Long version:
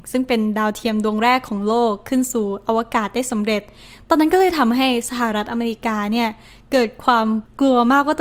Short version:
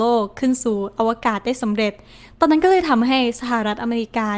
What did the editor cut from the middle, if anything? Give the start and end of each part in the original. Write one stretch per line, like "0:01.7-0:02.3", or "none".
none